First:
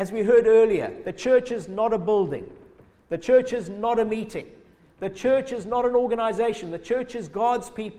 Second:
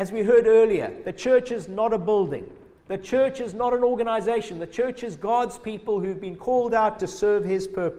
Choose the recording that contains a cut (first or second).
second